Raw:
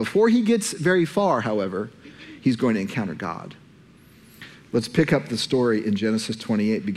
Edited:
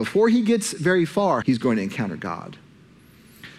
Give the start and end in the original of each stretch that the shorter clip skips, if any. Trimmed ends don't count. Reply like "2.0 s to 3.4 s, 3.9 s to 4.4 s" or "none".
1.4 s to 2.4 s